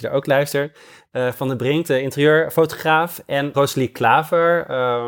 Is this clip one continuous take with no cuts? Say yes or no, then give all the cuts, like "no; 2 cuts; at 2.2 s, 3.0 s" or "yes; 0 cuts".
no; 1 cut; at 3.5 s